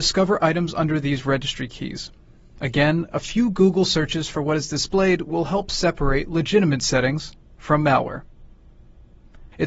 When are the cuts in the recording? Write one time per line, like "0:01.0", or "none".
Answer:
none